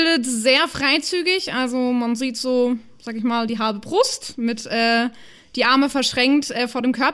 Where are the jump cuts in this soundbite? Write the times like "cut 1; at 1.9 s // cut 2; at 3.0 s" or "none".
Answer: none